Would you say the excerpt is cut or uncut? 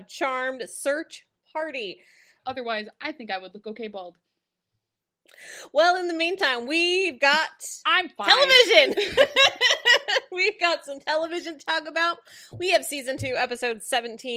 cut